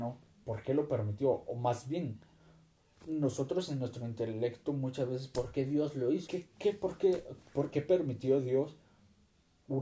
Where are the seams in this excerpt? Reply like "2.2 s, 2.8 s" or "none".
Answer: 6.3 s